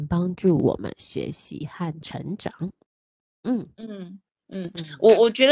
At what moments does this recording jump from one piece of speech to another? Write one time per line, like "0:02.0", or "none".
none